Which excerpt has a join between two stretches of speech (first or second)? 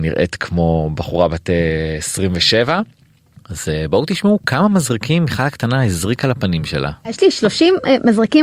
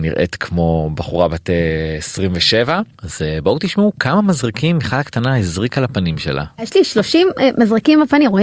second